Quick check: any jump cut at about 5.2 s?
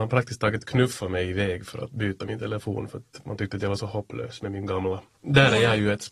yes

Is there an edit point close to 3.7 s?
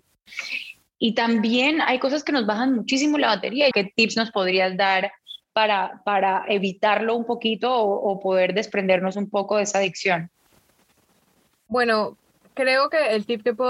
yes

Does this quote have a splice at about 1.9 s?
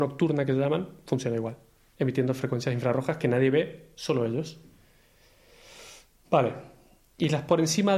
yes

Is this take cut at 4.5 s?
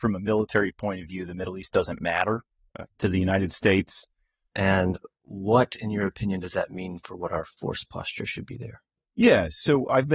yes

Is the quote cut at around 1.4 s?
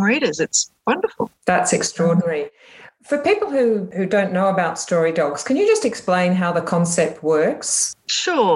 no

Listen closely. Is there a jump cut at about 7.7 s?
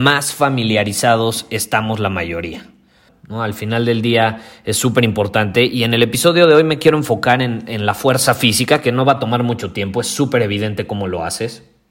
no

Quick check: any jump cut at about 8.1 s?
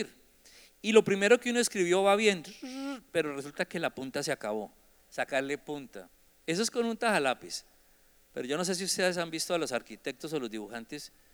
no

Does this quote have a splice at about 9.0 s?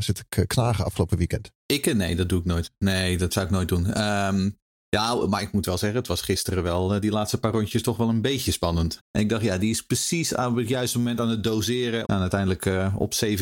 yes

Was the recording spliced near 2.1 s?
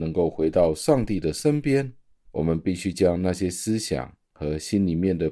yes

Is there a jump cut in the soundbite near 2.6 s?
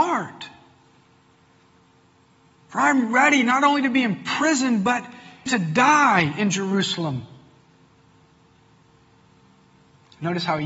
no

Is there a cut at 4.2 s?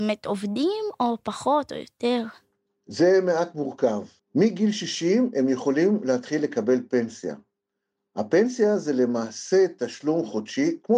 yes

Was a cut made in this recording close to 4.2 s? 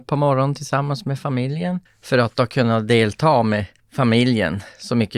no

